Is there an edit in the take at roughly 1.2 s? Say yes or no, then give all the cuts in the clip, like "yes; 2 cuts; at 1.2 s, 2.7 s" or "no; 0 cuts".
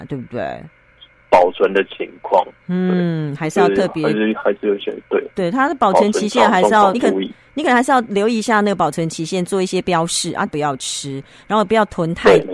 yes; 3 cuts; at 1.2 s, 6.9 s, 10.5 s